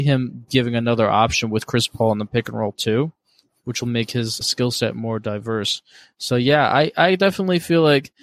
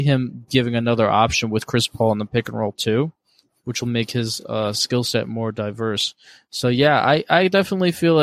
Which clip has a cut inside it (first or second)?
first